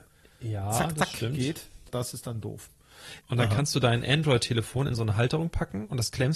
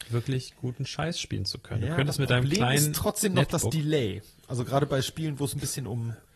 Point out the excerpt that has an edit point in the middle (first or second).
first